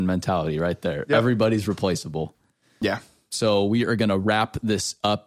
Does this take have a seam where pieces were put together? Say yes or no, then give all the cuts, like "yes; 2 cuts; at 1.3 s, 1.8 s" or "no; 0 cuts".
yes; 1 cut; at 2.8 s